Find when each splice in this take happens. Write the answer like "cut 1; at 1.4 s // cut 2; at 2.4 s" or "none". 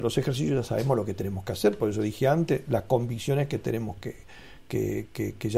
none